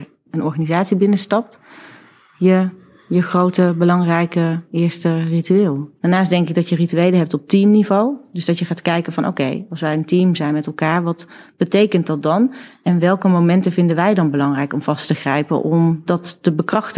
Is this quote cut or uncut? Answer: cut